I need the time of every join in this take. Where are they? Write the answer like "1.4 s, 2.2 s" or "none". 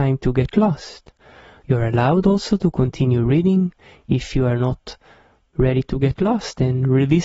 none